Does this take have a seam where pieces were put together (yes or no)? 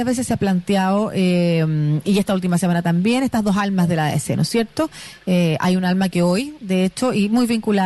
no